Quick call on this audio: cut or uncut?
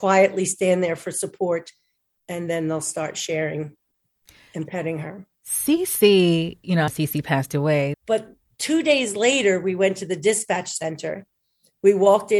cut